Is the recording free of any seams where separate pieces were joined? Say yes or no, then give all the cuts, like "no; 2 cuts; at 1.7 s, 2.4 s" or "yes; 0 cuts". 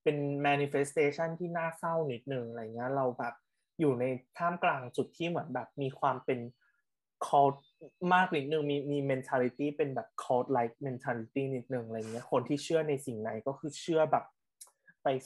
yes; 0 cuts